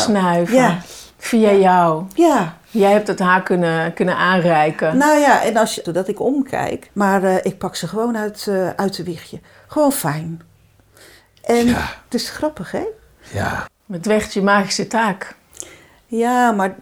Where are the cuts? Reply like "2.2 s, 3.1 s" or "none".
5.9 s, 6.9 s, 13.7 s

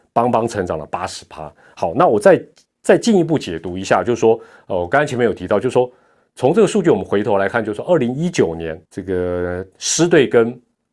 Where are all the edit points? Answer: 8.9 s

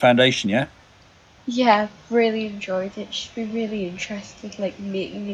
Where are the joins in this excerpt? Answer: none

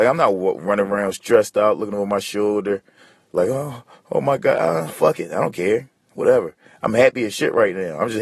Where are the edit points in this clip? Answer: none

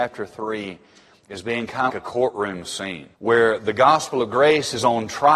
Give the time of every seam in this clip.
1.9 s, 3.1 s

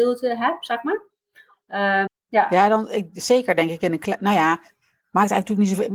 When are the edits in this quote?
2.1 s

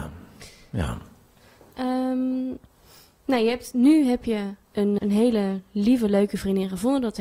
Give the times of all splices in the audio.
5.0 s

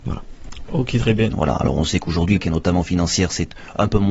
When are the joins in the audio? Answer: 1.3 s, 2.4 s

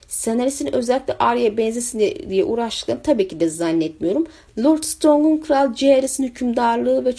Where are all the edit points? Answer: 4.5 s

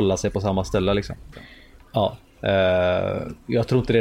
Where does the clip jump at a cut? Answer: 1.3 s

